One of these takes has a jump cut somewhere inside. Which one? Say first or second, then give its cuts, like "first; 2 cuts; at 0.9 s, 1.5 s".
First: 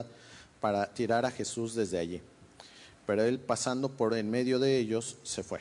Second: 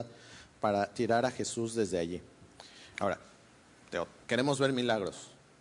second; 2 cuts; at 2.9 s, 4.2 s